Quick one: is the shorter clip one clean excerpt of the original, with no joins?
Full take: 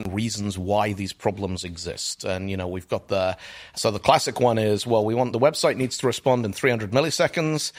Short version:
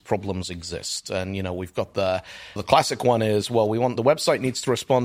no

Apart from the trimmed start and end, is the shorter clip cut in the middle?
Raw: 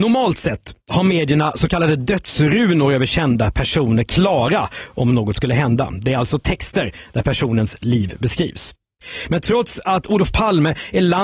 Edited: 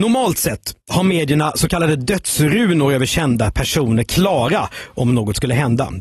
no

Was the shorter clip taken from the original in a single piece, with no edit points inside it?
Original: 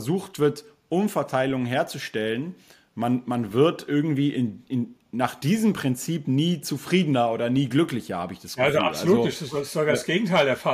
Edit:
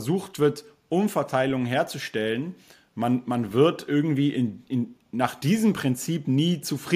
yes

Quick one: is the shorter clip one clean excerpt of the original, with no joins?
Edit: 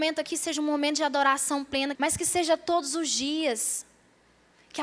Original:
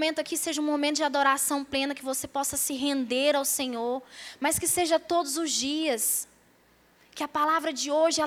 no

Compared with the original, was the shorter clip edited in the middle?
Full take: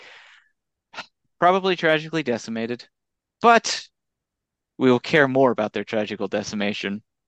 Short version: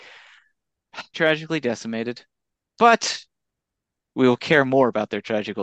yes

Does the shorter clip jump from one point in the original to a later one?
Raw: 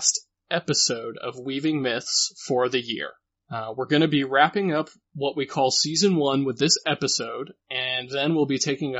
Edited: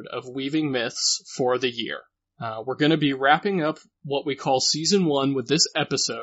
no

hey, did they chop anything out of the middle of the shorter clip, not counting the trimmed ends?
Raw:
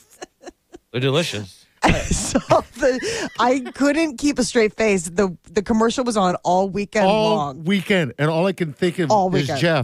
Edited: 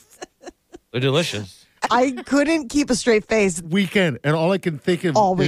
yes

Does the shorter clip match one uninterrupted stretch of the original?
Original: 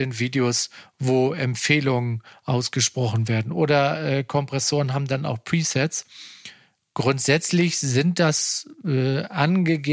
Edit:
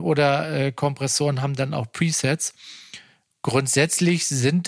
yes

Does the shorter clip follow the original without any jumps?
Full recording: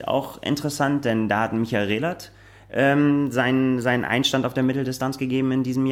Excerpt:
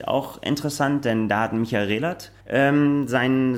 no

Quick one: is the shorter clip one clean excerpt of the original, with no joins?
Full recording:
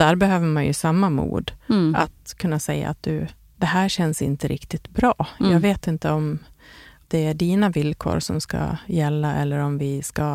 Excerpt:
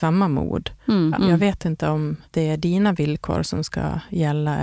no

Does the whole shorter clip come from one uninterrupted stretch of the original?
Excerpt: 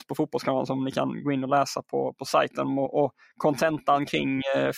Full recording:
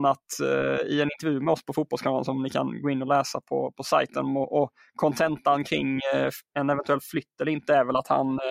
yes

